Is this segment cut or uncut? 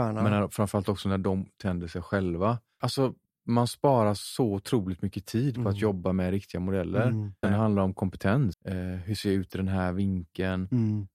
cut